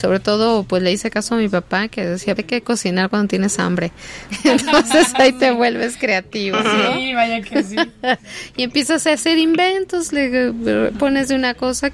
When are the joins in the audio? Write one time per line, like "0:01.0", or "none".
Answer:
0:02.4

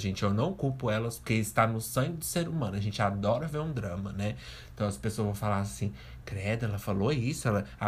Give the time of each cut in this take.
none

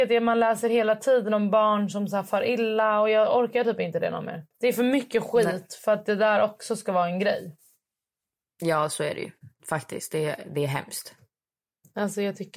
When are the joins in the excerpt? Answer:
0:04.5

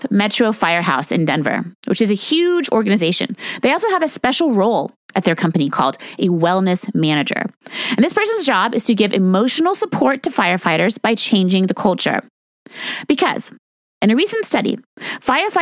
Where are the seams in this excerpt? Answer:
0:03.6

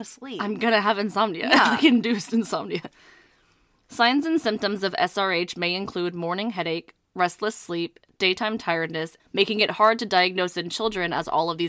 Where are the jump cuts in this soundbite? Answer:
0:09.2

